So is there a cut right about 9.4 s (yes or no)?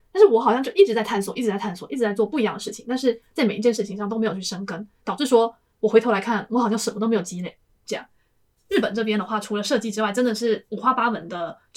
no